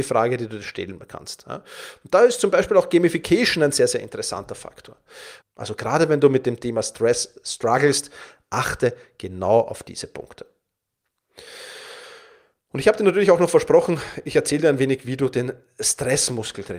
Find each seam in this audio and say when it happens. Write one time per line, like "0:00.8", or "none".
0:05.4